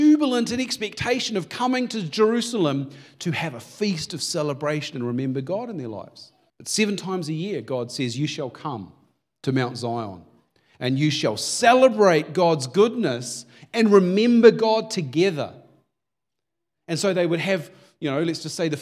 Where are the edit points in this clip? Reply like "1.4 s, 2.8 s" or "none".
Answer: 6.5 s